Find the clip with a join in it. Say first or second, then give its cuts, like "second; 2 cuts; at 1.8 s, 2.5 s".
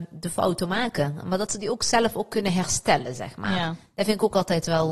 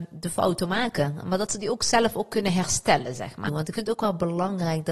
second; 1 cut; at 3.5 s